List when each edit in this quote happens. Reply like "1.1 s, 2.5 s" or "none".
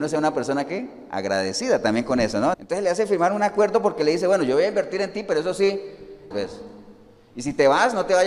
2.5 s, 6.3 s